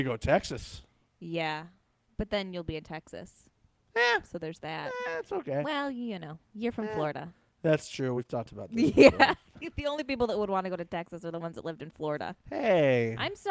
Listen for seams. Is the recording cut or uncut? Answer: uncut